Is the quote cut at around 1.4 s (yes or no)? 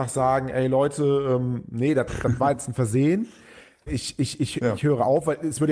no